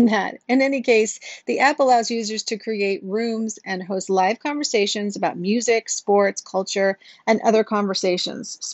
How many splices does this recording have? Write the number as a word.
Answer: zero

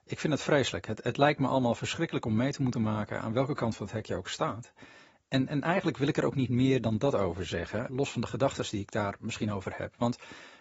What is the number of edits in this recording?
one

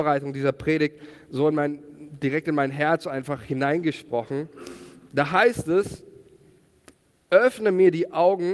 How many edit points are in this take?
zero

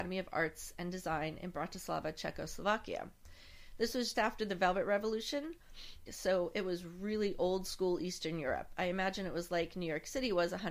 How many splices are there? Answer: two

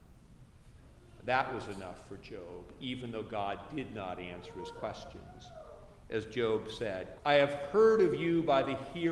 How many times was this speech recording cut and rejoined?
one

